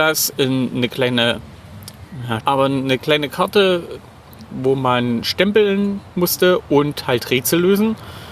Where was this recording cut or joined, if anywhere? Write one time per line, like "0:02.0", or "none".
0:02.4